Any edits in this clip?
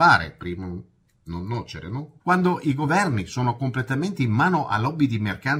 yes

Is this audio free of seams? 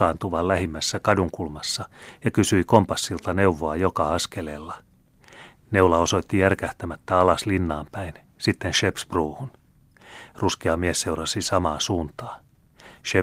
yes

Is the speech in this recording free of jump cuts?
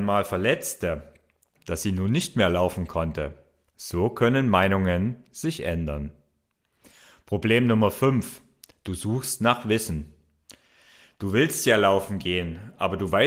no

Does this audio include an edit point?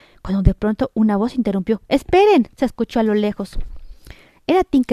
no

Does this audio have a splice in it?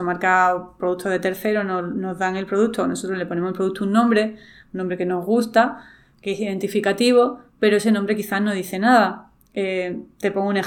no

